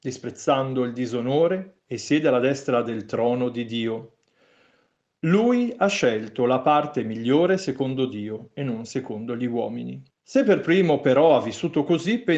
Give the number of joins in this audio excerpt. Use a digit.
1